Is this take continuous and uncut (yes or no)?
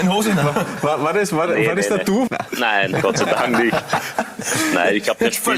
no